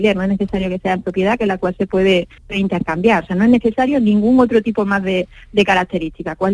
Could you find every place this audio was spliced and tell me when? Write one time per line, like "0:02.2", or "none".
0:02.4